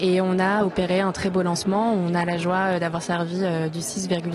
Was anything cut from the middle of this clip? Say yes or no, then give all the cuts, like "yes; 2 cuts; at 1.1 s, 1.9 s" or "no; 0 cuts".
no; 0 cuts